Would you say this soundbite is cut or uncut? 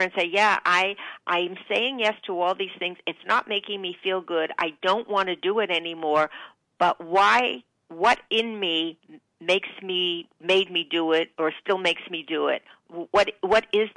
uncut